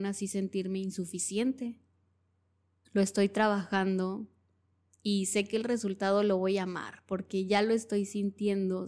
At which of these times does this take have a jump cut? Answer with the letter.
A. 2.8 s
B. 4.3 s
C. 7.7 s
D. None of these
A